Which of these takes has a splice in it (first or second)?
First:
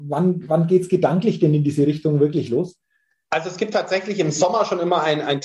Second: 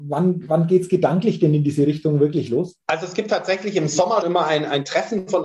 second